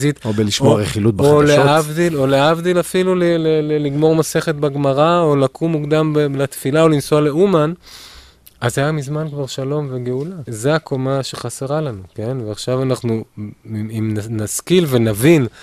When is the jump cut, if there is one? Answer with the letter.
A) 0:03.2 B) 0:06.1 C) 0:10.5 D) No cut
C